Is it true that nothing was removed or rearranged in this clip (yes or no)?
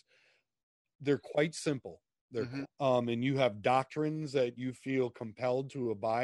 no